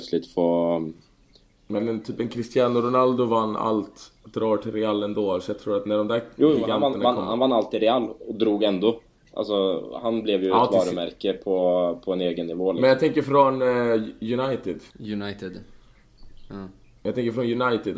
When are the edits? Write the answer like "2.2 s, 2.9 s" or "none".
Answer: 14.9 s